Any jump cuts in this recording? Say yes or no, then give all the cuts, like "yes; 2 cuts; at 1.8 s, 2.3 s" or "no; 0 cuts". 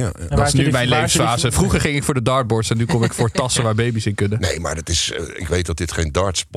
no; 0 cuts